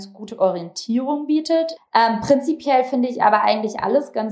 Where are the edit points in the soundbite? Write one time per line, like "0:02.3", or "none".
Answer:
0:01.8